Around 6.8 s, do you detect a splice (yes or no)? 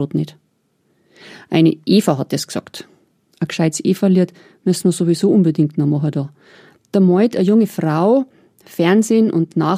yes